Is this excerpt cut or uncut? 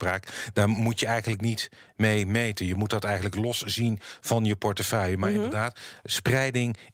uncut